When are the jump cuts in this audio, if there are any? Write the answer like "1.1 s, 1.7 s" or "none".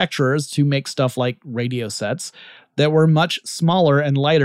none